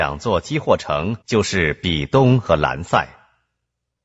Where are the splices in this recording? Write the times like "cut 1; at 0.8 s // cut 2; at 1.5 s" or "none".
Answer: cut 1; at 1.2 s